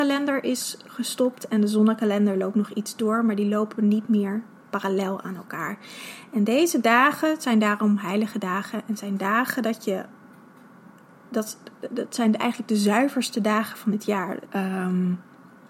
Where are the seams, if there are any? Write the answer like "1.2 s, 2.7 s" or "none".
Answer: 14.4 s